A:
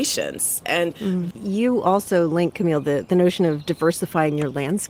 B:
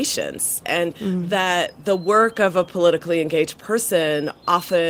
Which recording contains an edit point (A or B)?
A